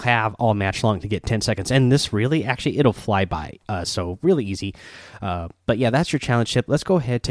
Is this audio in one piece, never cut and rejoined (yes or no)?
yes